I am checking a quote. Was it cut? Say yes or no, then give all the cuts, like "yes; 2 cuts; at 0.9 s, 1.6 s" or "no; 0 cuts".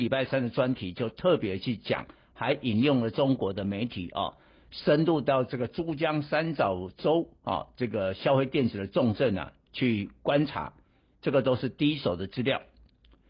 no; 0 cuts